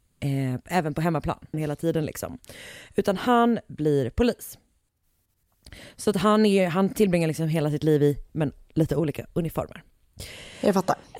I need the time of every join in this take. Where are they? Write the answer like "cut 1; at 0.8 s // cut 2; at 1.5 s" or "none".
cut 1; at 1.5 s // cut 2; at 8.3 s